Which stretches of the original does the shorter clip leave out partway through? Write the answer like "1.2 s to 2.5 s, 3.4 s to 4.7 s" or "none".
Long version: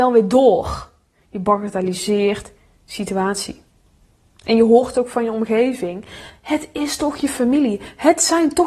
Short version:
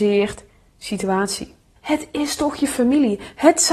3.8 s to 6.4 s